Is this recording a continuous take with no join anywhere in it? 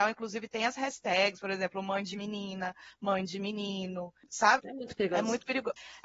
no; 1 cut; at 4.6 s

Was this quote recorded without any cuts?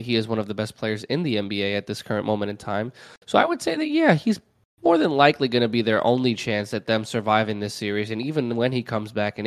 yes; 0 cuts

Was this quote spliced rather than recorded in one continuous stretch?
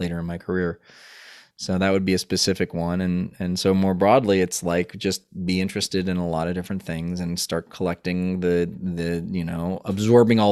no; 0 cuts

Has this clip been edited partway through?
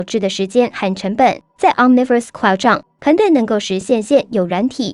no; 0 cuts

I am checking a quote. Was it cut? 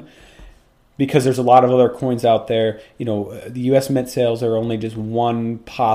no; 0 cuts

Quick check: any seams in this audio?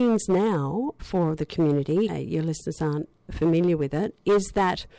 yes; 2 cuts; at 1.0 s, 2.1 s

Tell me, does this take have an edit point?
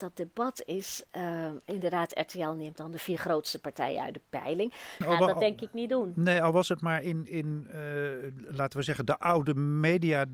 yes; 1 cut; at 5.0 s

